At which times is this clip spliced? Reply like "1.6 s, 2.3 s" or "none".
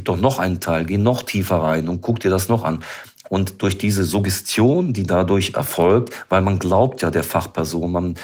none